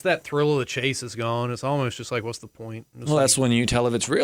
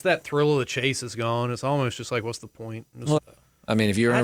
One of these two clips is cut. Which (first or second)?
second